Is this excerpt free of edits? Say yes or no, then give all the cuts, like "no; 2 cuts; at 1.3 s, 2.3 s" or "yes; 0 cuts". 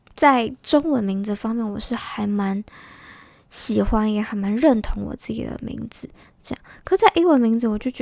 yes; 0 cuts